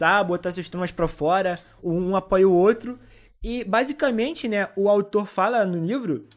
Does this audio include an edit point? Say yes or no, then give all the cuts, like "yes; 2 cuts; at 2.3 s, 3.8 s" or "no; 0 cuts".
no; 0 cuts